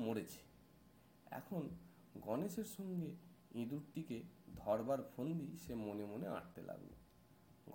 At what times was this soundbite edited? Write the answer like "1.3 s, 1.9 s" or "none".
none